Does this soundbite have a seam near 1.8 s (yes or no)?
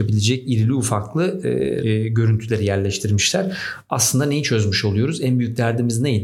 yes